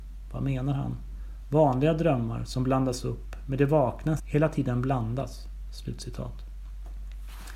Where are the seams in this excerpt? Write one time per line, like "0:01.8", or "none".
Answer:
0:04.2